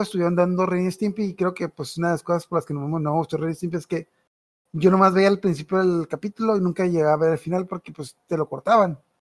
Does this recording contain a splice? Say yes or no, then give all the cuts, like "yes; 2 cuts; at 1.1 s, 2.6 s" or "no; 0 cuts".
no; 0 cuts